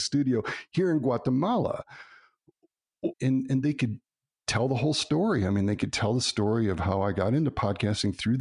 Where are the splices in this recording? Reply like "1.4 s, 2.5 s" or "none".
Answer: 3.1 s